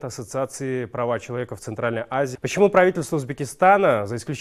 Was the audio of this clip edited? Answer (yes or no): yes